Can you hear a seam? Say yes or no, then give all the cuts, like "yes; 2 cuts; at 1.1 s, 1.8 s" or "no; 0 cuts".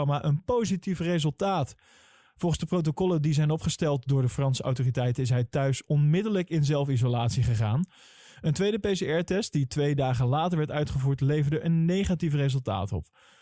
no; 0 cuts